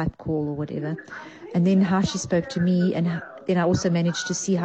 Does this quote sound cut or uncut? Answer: uncut